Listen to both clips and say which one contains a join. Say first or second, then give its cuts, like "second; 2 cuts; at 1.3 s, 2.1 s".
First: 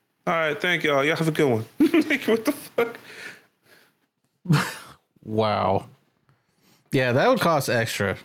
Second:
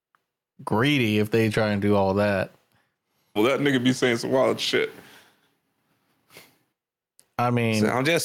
second; 1 cut; at 3.4 s